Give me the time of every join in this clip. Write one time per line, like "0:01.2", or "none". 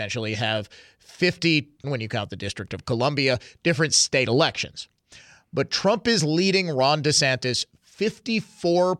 0:01.8